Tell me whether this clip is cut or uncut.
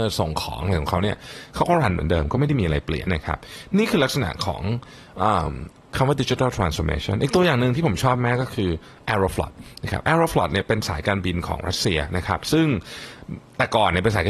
cut